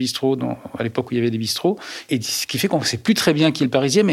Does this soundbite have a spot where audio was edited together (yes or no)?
no